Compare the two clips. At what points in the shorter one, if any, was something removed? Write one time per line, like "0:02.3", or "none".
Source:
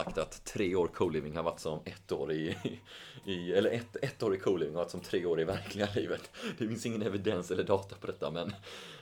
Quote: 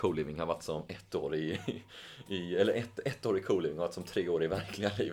none